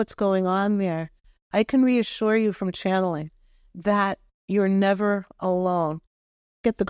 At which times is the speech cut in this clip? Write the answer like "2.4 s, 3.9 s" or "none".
none